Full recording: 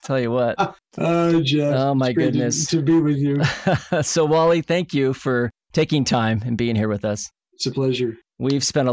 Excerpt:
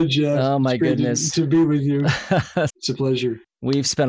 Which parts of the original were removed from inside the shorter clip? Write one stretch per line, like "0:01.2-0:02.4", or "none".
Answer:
0:04.0-0:07.5

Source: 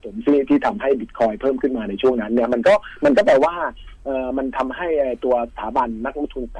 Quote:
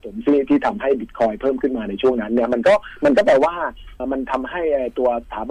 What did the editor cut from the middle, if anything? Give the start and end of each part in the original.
0:04.0-0:04.3

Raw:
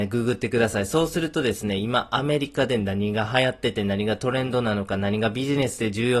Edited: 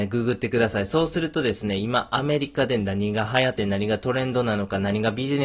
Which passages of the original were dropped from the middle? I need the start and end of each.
0:03.6-0:03.7

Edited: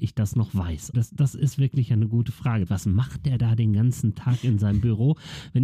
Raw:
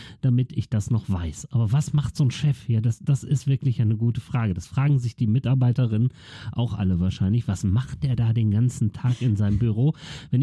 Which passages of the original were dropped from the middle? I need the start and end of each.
0:01.5-0:02.8
0:04.6-0:07.4

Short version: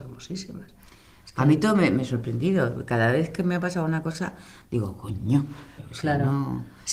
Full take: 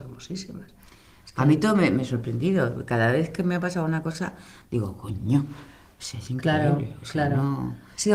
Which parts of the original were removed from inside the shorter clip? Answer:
0:05.8-0:06.9

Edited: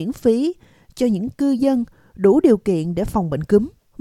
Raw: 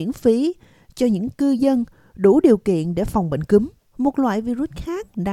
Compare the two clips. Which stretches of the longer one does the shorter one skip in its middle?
none

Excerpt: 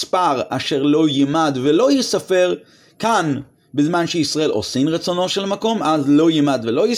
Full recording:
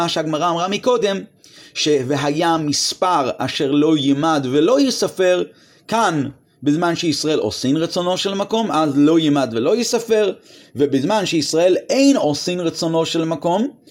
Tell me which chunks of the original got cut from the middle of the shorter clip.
none

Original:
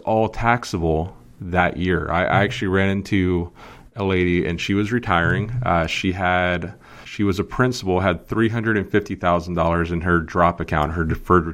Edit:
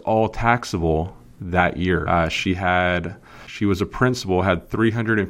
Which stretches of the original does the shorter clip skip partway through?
0:02.1-0:05.6

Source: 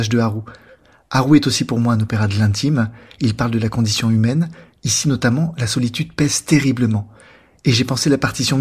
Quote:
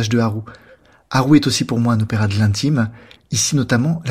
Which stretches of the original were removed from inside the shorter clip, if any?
0:03.2-0:04.7

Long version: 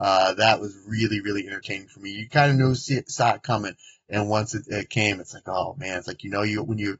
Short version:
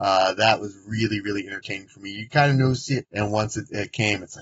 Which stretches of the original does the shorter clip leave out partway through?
0:03.0-0:04.0

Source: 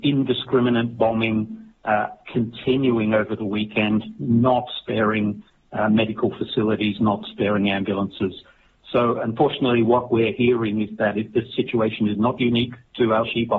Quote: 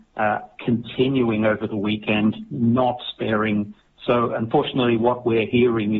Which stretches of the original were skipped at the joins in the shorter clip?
0:05.6-0:08.8

